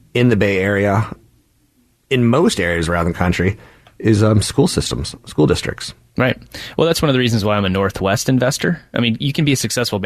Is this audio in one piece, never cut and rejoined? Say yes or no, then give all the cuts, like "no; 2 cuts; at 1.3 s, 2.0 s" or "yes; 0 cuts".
yes; 0 cuts